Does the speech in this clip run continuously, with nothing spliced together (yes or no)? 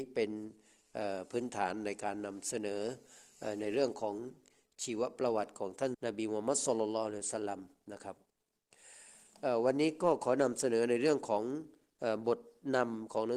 no